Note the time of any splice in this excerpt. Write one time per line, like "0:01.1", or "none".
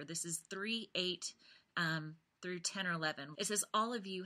0:03.3